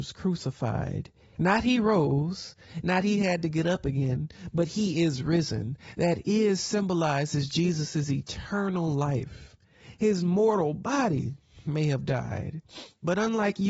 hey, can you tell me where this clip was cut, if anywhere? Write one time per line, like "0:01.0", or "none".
0:01.4